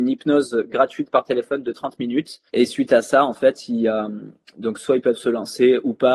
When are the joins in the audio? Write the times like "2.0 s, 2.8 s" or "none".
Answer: 2.5 s